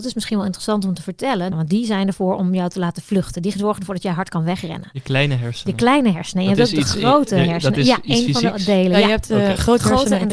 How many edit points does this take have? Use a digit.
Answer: 1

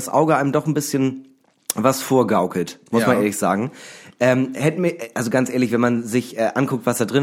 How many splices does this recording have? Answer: 0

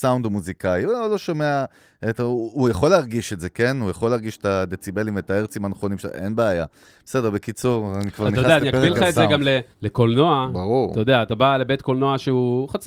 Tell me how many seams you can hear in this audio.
1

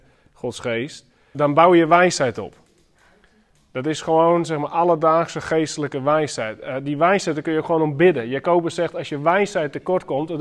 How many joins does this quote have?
1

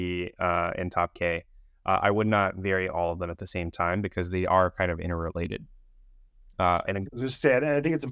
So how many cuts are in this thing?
1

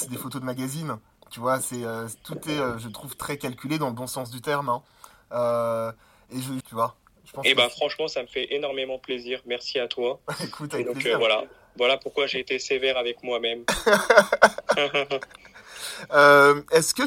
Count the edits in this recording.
1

